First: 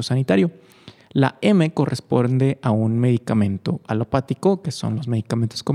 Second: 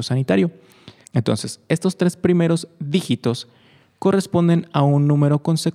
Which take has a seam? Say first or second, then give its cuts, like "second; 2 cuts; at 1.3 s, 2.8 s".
second; 1 cut; at 1.0 s